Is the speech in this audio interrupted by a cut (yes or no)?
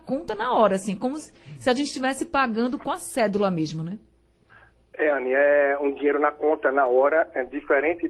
no